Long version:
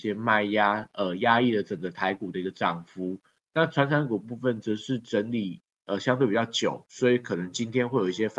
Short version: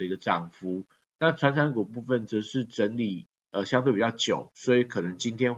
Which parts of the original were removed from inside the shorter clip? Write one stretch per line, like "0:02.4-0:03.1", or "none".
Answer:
none